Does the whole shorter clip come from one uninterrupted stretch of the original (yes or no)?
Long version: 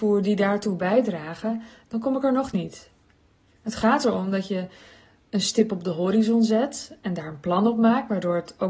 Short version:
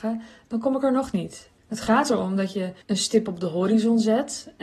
no